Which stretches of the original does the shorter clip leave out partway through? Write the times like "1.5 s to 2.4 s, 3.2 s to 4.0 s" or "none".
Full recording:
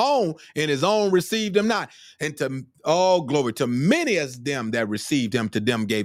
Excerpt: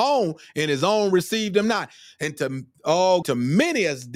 3.2 s to 3.5 s